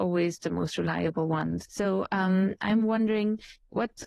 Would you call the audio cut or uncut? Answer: cut